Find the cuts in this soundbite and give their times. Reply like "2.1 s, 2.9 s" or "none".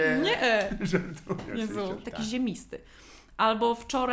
2.0 s